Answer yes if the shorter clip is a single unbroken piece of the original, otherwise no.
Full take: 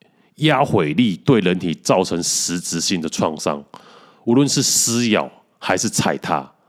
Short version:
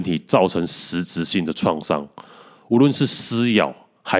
yes